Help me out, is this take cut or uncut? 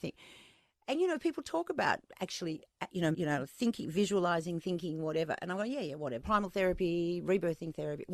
cut